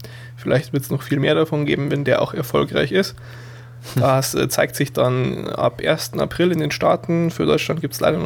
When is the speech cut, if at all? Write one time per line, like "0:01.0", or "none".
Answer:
none